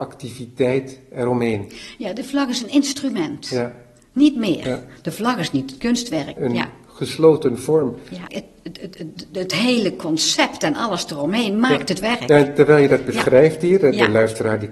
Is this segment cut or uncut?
cut